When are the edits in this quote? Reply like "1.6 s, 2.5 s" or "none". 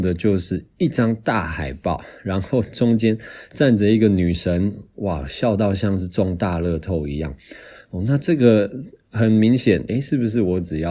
9.9 s

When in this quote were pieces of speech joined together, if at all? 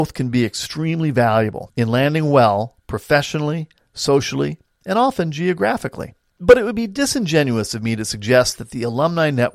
none

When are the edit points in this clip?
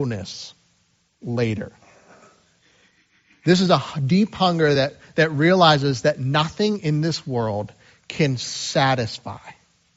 none

